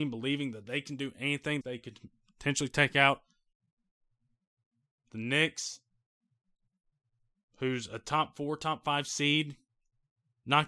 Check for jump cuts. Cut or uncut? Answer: cut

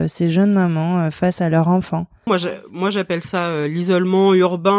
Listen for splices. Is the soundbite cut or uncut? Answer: cut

